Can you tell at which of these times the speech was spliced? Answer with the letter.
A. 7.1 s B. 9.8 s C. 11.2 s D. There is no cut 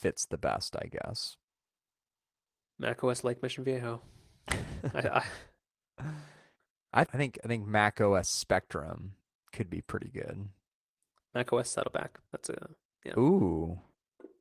A